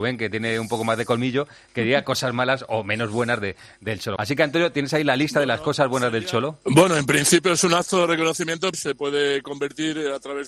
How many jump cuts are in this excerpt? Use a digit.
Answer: 3